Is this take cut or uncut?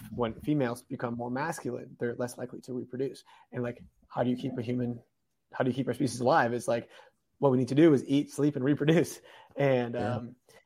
uncut